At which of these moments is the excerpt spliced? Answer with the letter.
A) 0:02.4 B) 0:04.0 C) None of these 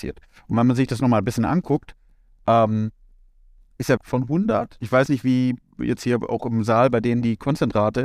B